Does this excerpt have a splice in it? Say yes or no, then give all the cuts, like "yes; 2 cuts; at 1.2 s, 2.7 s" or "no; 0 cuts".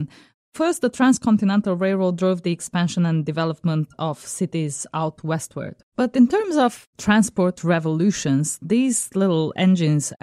yes; 1 cut; at 5.8 s